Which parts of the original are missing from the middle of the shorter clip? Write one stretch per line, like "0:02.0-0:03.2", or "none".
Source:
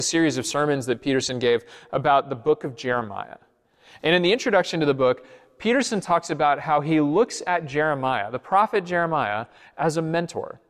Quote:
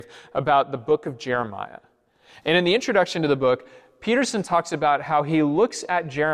none